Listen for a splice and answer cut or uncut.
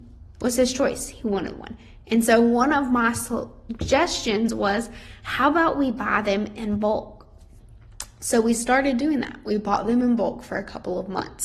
uncut